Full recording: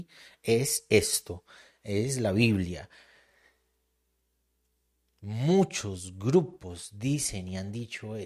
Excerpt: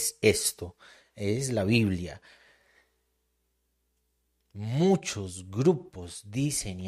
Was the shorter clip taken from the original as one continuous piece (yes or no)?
yes